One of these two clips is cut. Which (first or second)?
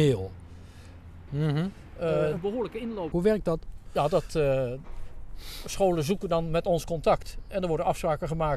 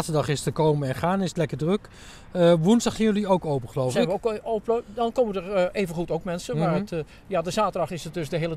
first